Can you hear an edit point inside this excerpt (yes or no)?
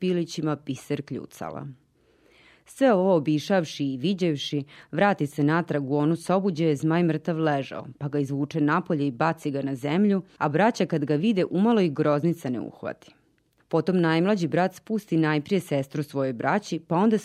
no